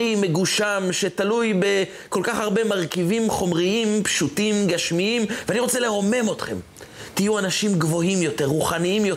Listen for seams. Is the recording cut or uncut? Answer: uncut